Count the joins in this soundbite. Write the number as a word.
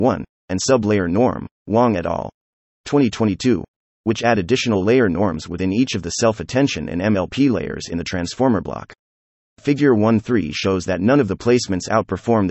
zero